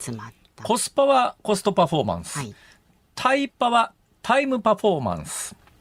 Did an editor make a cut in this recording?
no; 0 cuts

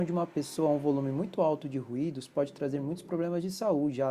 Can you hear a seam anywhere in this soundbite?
no; 0 cuts

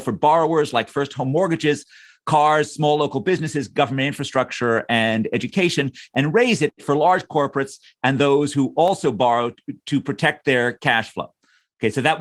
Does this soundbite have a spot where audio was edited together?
no; 0 cuts

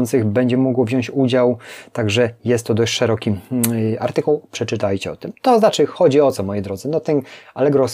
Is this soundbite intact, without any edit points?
yes; 0 cuts

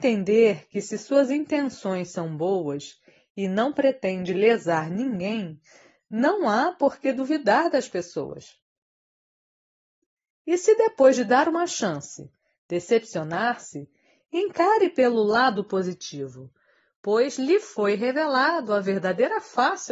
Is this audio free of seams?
yes; 0 cuts

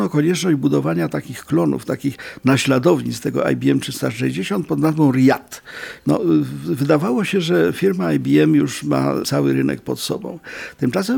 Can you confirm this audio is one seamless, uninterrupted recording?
no; 2 cuts; at 6.0 s, 9.2 s

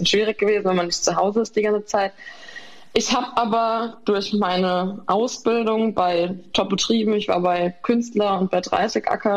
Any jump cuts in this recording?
no; 0 cuts

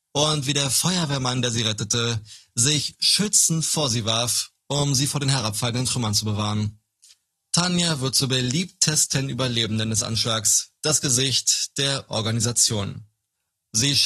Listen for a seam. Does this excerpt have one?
no; 0 cuts

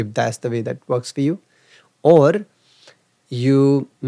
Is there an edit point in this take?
no; 0 cuts

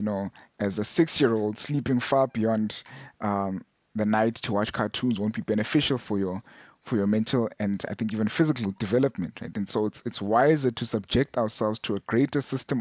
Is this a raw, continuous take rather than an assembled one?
no; 1 cut; at 9.5 s

